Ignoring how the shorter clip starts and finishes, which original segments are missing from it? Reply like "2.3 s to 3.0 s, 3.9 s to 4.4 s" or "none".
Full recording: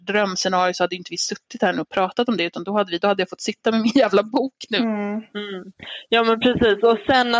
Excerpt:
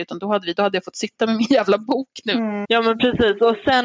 5.1 s to 6.1 s

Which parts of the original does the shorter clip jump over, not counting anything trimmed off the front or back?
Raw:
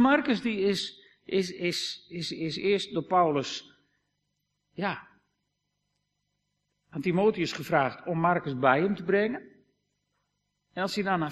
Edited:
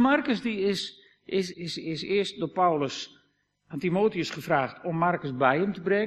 1.5 s to 2.1 s, 4.1 s to 6.8 s

